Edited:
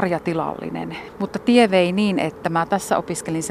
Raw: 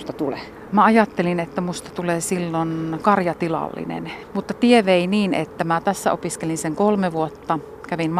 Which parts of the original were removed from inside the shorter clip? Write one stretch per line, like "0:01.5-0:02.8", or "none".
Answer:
none